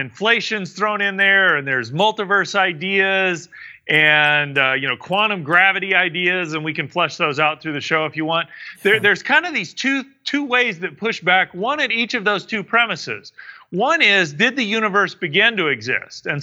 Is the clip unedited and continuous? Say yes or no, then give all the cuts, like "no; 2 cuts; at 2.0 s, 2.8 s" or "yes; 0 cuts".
yes; 0 cuts